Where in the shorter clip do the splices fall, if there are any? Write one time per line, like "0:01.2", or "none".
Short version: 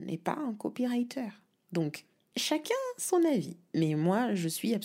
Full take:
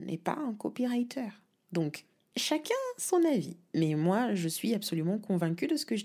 none